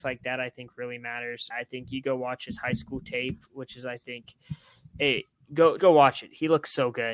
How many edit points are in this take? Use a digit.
2